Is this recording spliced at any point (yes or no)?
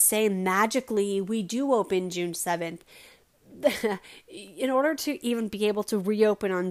no